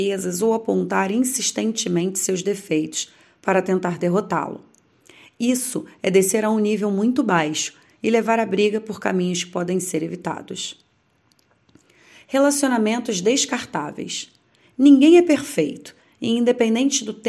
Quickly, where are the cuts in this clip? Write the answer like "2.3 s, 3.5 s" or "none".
none